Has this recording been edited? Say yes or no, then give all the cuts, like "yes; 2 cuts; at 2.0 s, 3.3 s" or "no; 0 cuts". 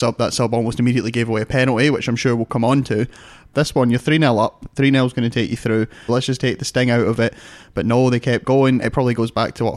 yes; 2 cuts; at 3.5 s, 6.1 s